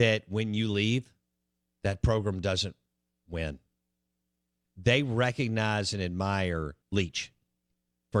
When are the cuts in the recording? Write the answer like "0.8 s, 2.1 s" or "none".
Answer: 4.6 s, 6.8 s